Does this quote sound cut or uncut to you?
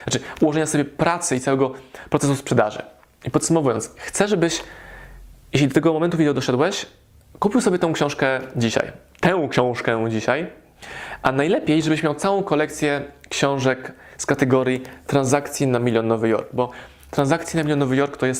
uncut